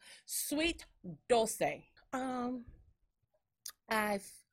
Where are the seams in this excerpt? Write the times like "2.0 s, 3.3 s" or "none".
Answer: 2.0 s

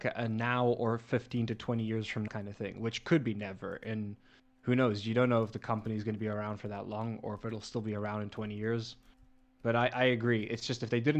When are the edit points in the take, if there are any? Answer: 2.3 s

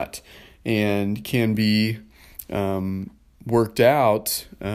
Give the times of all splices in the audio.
none

